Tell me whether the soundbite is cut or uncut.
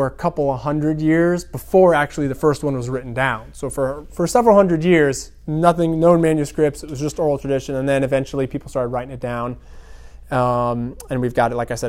uncut